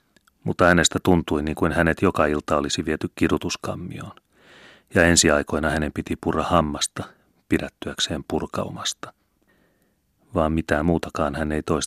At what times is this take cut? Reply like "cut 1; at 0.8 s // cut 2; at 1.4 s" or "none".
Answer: none